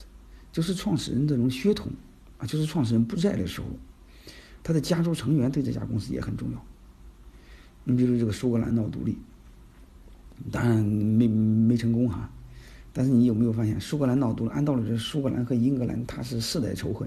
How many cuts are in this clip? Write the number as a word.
zero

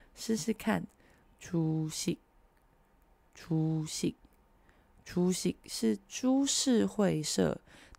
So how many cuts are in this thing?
one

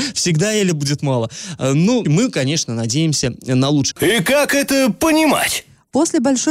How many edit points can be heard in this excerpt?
two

